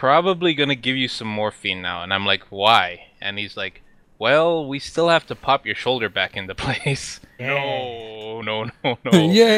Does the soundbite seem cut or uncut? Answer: cut